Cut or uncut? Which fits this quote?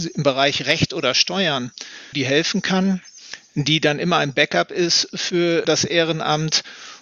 cut